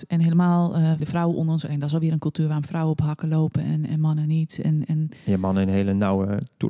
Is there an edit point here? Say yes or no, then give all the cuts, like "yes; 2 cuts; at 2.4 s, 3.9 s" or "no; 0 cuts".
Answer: yes; 1 cut; at 1.0 s